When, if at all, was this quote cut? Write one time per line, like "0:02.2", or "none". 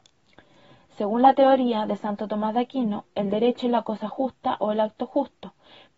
none

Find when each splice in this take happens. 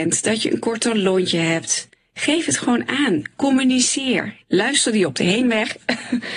0:04.4

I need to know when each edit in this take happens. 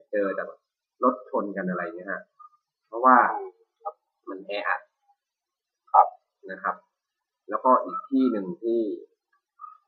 none

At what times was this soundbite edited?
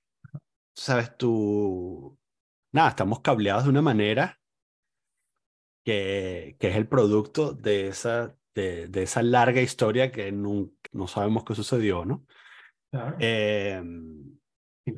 0:10.9

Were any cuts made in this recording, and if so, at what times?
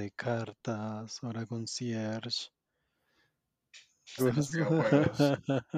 0:04.2

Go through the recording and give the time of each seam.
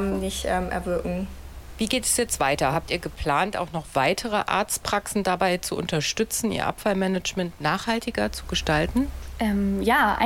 none

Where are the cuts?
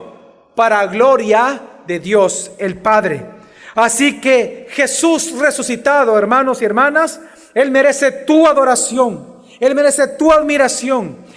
none

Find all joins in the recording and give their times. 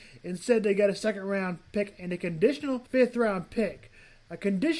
0:02.9

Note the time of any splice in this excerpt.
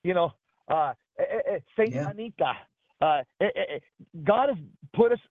none

